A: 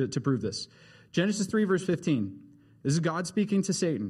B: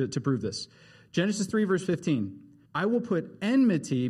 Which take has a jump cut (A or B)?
B